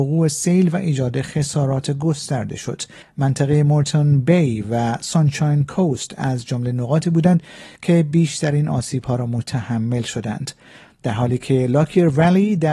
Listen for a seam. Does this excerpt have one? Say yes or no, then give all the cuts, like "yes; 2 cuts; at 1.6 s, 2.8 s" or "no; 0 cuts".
yes; 1 cut; at 3.0 s